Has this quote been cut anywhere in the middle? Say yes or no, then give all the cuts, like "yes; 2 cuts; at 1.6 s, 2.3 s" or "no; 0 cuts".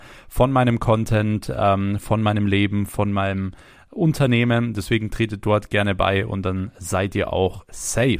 no; 0 cuts